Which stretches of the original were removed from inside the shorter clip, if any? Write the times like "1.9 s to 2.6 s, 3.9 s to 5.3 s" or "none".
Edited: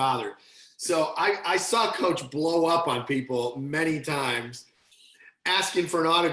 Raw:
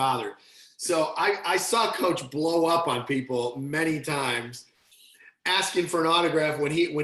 none